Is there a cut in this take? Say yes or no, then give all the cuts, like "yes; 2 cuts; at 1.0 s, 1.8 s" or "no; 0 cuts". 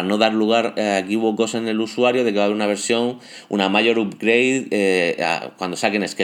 no; 0 cuts